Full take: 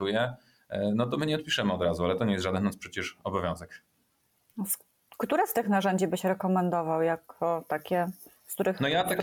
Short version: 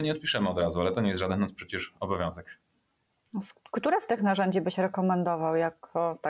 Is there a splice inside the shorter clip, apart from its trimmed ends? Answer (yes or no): yes